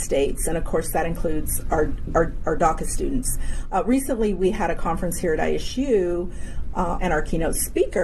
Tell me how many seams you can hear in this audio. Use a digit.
1